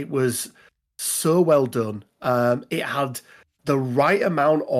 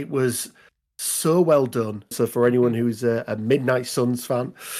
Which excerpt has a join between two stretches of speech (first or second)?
second